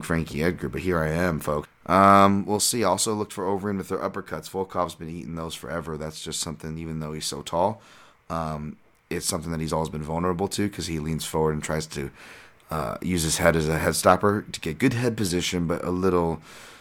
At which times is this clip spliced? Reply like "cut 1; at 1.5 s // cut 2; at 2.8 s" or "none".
cut 1; at 1.6 s